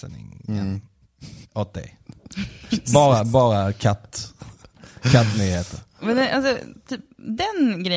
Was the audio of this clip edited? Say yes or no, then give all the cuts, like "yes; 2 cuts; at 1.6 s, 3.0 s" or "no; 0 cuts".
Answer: no; 0 cuts